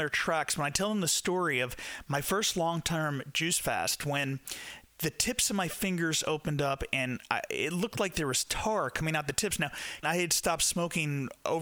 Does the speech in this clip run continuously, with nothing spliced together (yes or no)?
no